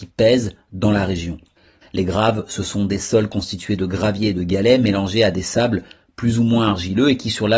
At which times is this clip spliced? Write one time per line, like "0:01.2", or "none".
0:01.8